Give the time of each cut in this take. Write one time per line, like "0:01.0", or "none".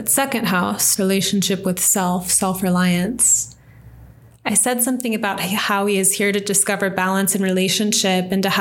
0:01.0